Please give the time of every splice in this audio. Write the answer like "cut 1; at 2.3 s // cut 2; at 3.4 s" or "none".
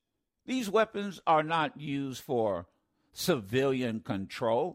none